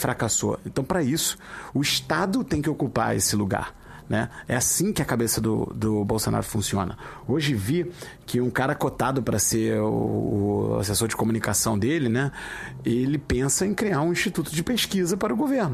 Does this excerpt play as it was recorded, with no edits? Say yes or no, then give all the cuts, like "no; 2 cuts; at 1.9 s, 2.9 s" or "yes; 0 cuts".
yes; 0 cuts